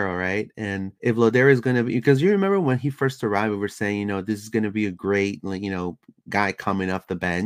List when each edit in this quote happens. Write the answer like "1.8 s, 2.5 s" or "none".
1.0 s